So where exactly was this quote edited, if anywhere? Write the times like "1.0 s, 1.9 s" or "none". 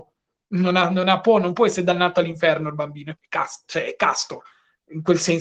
3.1 s